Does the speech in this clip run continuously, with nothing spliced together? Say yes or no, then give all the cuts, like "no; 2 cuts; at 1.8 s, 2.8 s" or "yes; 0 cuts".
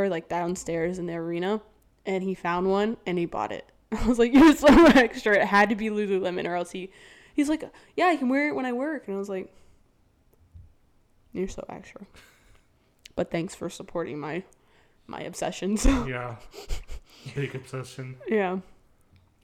yes; 0 cuts